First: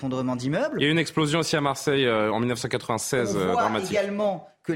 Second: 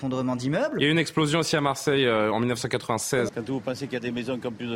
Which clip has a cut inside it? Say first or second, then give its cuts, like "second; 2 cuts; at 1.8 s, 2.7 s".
second; 1 cut; at 3.3 s